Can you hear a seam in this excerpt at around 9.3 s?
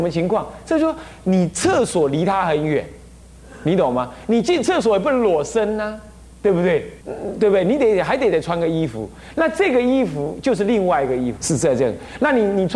no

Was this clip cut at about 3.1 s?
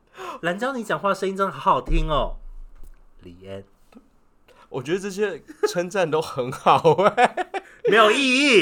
no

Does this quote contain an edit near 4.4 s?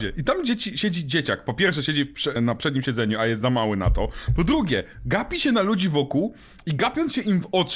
no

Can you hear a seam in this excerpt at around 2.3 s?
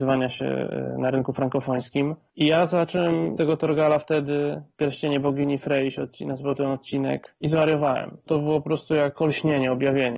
no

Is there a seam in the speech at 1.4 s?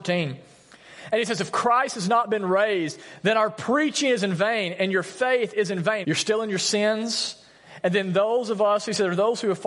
no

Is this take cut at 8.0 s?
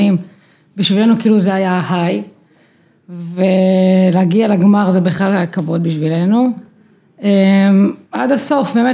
yes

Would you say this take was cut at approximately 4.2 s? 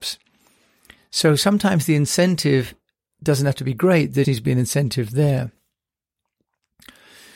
yes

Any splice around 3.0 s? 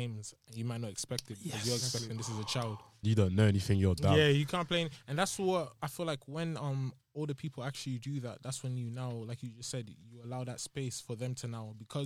yes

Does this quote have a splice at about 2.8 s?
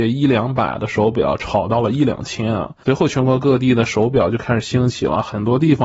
yes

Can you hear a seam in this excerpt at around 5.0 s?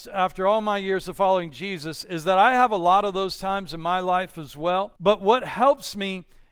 yes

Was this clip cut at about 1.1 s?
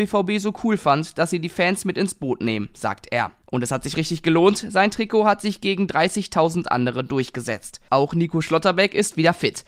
no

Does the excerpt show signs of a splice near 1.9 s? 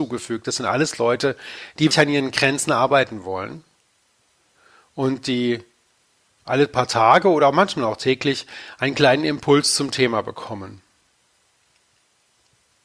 yes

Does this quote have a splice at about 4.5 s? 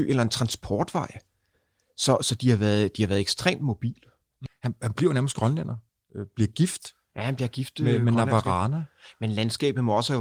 yes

